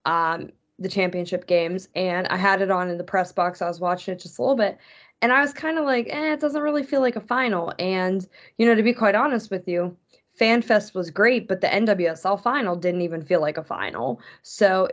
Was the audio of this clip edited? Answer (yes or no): no